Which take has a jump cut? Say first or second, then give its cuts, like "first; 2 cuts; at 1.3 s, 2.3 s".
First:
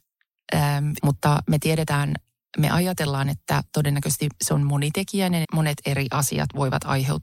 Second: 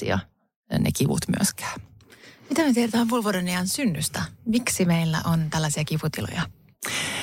first; 2 cuts; at 1.0 s, 5.4 s